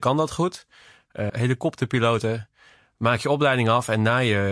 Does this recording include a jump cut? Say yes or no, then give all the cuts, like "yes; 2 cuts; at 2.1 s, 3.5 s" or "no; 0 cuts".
yes; 1 cut; at 1.3 s